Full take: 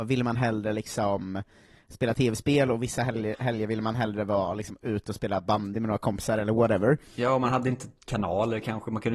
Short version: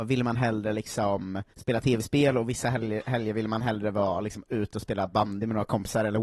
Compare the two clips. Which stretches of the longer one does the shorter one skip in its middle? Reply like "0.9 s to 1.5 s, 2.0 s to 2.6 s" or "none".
1.5 s to 1.8 s